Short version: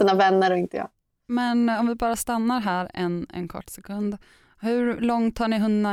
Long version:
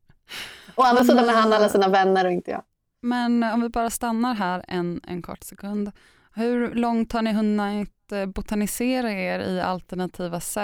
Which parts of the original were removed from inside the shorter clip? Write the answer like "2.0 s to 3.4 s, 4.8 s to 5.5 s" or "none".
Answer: none

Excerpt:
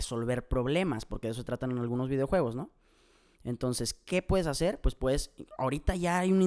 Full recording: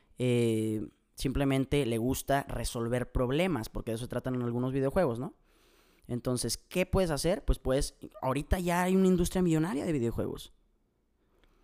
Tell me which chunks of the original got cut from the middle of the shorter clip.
none

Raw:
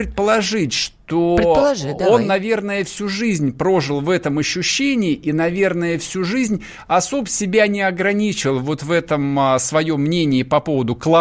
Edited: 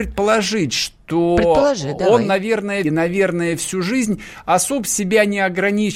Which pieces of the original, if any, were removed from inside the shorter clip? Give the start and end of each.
2.8 s to 5.3 s

